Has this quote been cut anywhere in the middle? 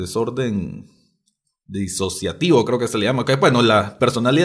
no; 0 cuts

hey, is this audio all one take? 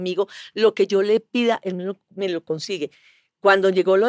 yes; 0 cuts

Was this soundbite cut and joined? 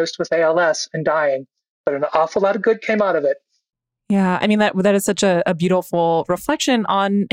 no; 0 cuts

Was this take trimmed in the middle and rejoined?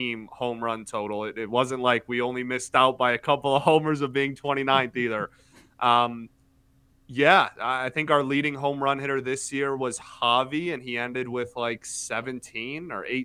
no; 0 cuts

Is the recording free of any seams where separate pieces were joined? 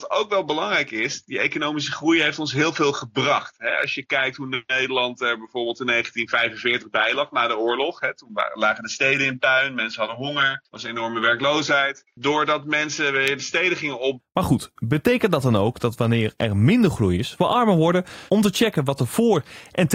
no; 2 cuts; at 14.2 s, 18.3 s

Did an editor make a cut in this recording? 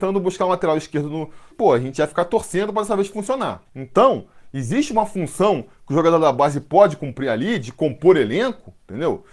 yes; 2 cuts; at 1.5 s, 3.7 s

